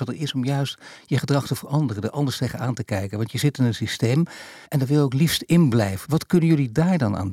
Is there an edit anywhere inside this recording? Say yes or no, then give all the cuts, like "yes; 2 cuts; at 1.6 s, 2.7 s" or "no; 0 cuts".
yes; 2 cuts; at 4.6 s, 6.0 s